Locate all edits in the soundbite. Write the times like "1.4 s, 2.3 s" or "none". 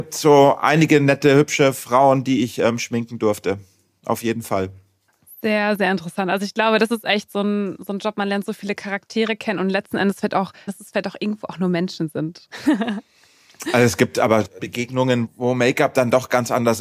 10.7 s, 14.6 s